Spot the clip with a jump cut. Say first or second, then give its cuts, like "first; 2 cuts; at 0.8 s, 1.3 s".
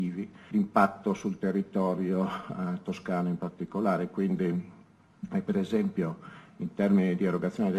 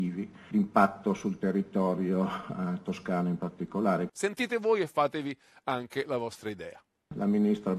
second; 1 cut; at 4.1 s